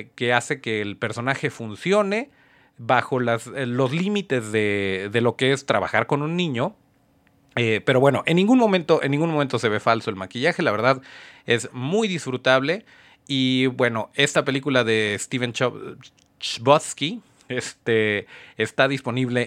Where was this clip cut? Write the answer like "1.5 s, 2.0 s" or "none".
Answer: none